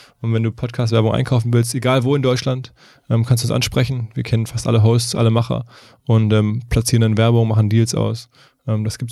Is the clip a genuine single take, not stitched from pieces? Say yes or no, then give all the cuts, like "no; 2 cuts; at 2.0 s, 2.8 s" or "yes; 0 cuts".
yes; 0 cuts